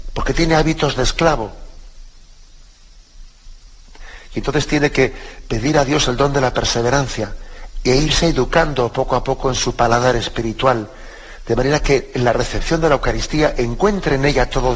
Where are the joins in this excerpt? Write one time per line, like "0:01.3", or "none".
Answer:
none